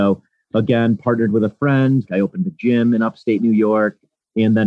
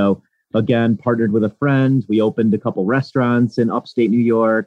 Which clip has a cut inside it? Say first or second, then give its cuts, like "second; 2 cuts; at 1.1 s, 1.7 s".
first; 1 cut; at 2.1 s